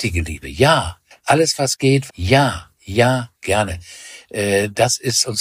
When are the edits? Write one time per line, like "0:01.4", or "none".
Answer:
0:02.1
0:03.3